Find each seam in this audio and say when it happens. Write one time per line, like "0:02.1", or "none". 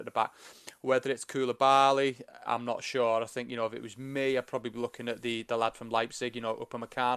0:02.5